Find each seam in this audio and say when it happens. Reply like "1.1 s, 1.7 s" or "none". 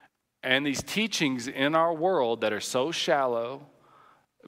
none